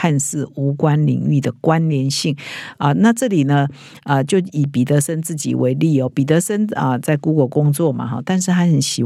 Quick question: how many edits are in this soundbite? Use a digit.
0